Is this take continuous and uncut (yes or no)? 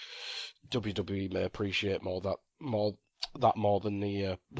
yes